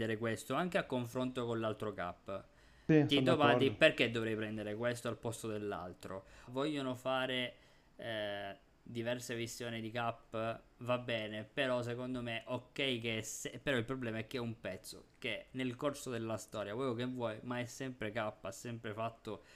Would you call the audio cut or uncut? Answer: cut